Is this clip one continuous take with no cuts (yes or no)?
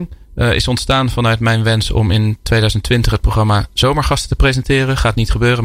yes